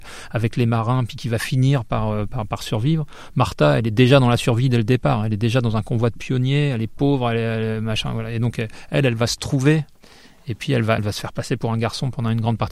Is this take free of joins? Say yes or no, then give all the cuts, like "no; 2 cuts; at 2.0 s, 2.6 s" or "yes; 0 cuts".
no; 1 cut; at 11.0 s